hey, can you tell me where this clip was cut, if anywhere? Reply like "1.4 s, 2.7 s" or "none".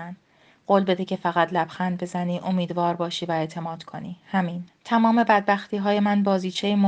4.7 s

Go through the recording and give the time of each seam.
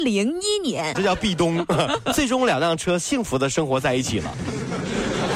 0.9 s

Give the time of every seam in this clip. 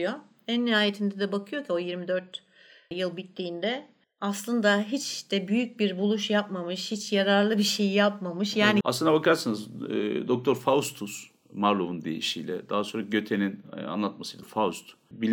8.8 s

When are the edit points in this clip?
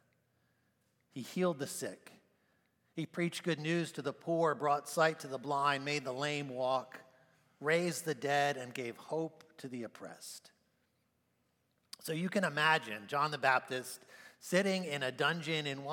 none

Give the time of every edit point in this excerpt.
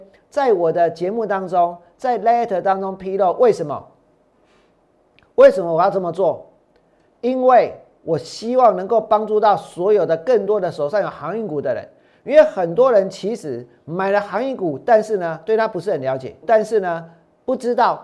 16.4 s

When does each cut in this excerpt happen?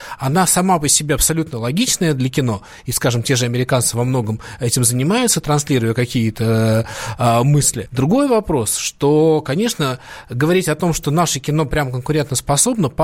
7.9 s

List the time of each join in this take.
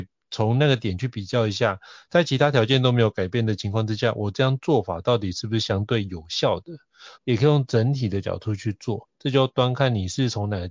7.1 s

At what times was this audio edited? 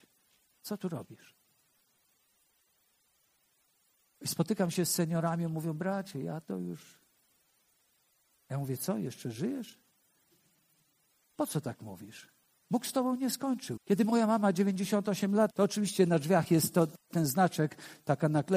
13.8 s, 15.5 s

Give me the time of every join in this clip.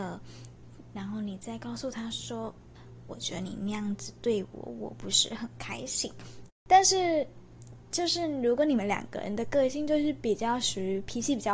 3.1 s, 6.5 s

